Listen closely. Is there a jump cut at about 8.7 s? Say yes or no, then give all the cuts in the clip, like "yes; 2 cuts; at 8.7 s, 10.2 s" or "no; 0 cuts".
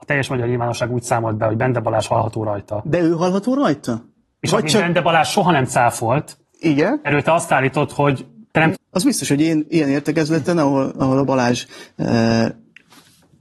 yes; 1 cut; at 8.7 s